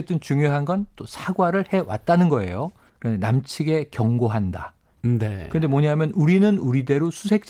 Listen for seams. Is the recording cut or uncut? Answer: cut